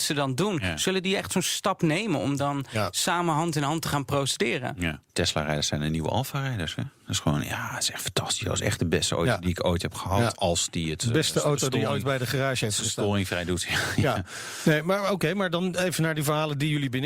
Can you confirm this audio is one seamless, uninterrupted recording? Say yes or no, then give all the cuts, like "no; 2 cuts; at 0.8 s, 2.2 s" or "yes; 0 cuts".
yes; 0 cuts